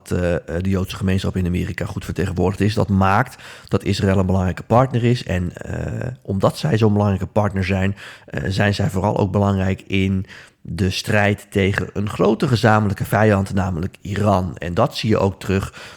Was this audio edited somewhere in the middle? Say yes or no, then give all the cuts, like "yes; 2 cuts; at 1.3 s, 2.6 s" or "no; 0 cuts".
no; 0 cuts